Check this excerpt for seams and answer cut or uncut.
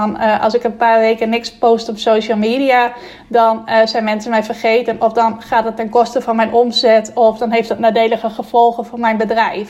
uncut